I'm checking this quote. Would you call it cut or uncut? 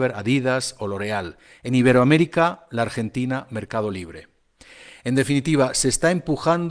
uncut